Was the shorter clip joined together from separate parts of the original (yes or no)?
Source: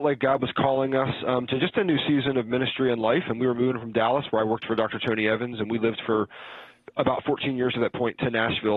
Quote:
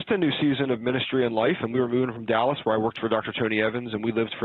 no